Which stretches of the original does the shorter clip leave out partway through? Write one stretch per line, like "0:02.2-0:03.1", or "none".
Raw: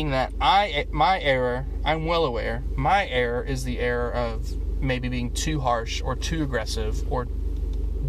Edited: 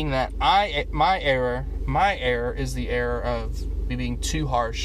0:01.8-0:02.7
0:04.8-0:05.0